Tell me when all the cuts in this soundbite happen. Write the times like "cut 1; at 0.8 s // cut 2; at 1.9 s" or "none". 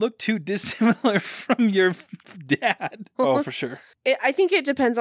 cut 1; at 3.1 s